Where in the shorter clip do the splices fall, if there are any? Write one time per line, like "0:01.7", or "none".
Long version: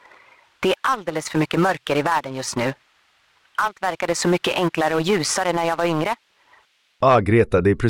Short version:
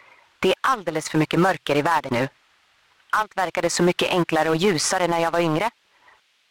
0:02.1